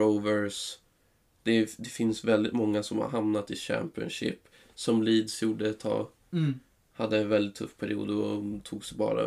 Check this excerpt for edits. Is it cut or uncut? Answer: uncut